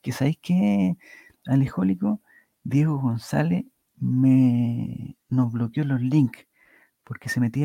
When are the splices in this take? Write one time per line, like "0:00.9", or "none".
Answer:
none